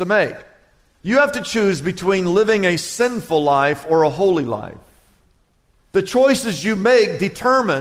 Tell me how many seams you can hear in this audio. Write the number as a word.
one